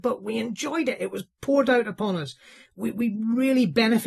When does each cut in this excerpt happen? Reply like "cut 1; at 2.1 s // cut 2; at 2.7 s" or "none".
none